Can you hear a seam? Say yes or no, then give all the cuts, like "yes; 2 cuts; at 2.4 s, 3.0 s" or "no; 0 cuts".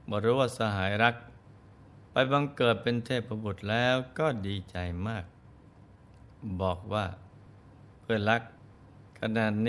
no; 0 cuts